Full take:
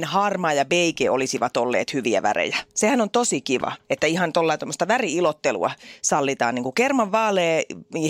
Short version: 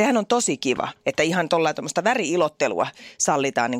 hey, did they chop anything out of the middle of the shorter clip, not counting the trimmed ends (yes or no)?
no